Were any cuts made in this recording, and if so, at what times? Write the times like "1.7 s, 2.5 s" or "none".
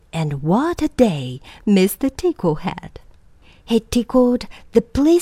none